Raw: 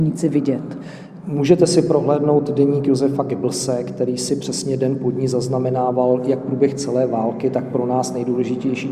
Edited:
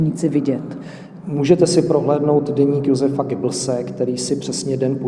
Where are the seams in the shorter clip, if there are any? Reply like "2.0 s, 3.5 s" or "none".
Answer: none